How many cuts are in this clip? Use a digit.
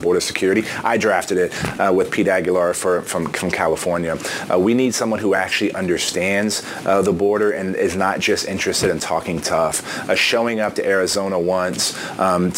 0